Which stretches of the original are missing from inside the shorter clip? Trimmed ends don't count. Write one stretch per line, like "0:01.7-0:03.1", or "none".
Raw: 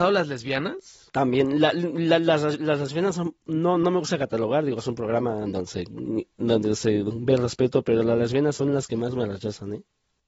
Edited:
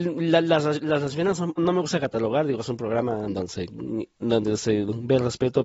0:03.3-0:03.8